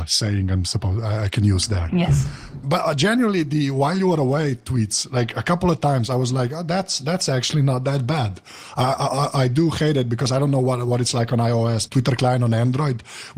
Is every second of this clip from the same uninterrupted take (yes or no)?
no